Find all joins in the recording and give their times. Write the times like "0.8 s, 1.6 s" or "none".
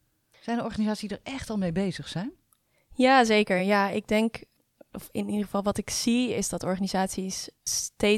none